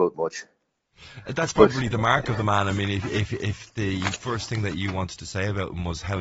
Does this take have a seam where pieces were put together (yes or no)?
no